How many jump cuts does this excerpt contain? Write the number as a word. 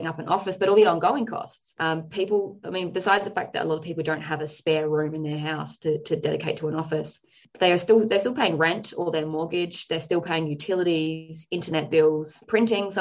zero